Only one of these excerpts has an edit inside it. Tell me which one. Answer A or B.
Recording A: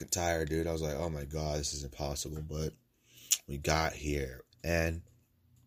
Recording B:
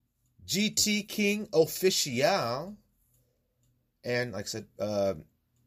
A